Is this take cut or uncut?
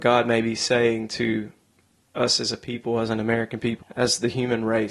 cut